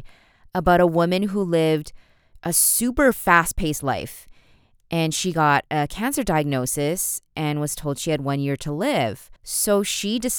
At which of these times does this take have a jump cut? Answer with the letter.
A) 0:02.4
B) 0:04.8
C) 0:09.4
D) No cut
C